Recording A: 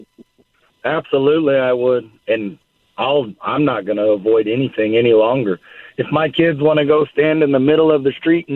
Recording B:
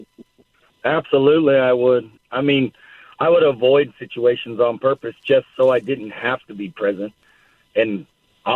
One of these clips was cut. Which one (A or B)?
A